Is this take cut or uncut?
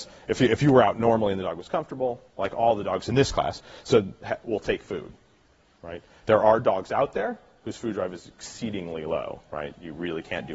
cut